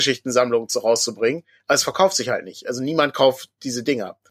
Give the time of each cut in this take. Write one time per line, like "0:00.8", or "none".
none